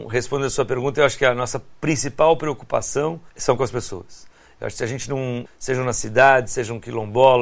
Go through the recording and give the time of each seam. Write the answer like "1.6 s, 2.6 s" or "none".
3.3 s, 5.5 s